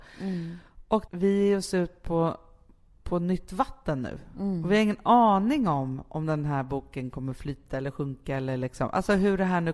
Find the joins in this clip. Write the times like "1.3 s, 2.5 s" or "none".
none

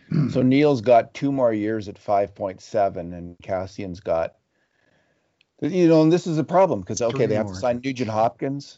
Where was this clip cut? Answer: none

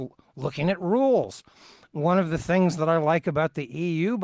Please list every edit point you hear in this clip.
none

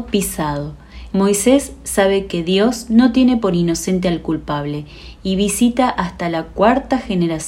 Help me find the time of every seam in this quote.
1.1 s

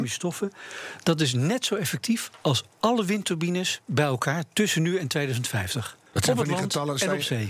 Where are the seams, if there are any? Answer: 6.1 s

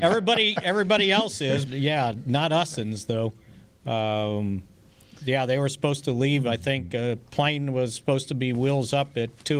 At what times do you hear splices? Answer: 1.7 s

